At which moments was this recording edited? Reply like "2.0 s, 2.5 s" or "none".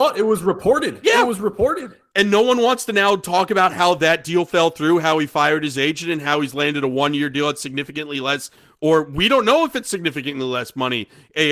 none